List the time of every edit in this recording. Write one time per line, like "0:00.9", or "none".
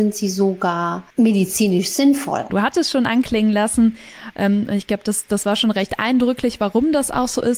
0:01.1
0:02.5